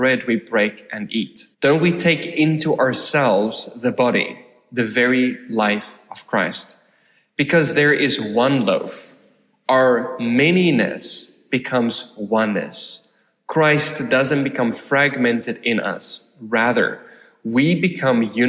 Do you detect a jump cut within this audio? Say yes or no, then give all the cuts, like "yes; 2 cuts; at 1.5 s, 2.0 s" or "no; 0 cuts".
yes; 1 cut; at 1.5 s